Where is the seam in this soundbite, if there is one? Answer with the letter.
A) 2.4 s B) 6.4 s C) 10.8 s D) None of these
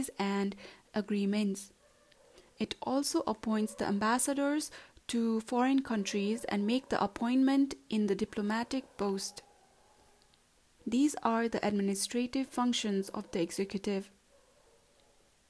C